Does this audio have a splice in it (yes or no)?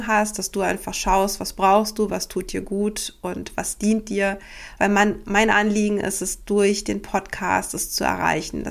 no